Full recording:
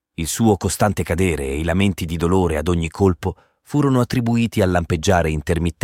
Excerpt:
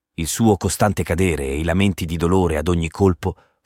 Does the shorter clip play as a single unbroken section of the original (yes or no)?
yes